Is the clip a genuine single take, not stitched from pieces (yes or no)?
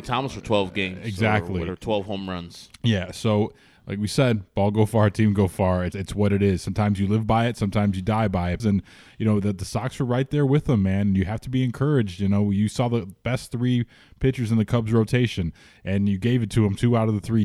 no